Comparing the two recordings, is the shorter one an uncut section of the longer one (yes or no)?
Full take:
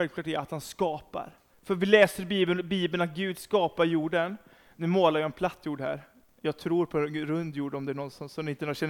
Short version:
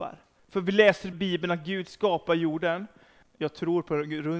no